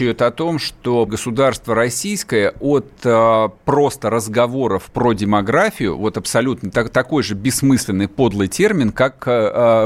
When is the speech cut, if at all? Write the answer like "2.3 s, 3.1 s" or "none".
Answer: 1.1 s